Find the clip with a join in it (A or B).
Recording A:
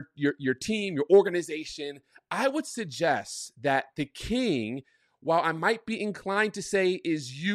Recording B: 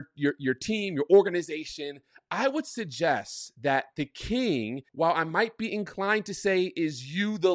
B